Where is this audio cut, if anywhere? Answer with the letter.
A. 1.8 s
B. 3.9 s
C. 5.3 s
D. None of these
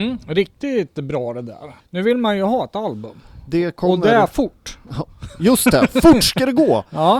A